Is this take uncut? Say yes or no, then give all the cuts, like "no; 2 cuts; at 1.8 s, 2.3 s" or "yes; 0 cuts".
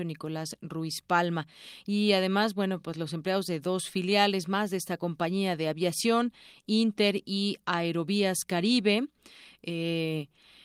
yes; 0 cuts